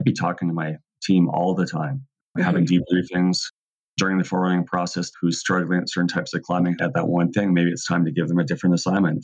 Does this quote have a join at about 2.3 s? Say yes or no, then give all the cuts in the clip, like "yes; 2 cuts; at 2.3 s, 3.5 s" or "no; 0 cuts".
no; 2 cuts; at 5.1 s, 6.8 s